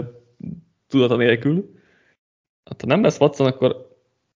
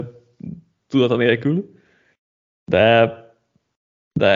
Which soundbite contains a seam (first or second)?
first